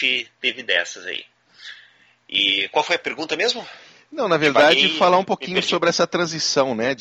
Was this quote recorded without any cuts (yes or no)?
yes